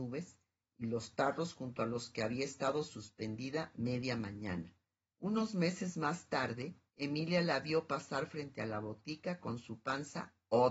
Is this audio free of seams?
no; 2 cuts; at 5.1 s, 6.9 s

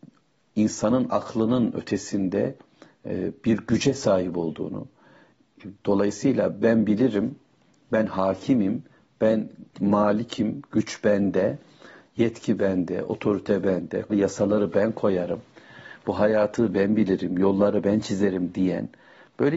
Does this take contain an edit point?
yes; 1 cut; at 14.1 s

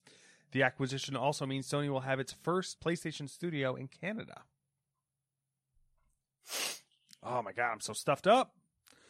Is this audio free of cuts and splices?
no; 1 cut; at 2.8 s

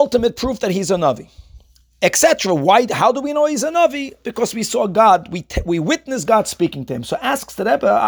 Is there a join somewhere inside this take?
no; 0 cuts

